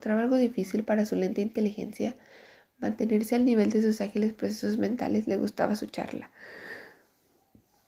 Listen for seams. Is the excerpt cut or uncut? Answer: uncut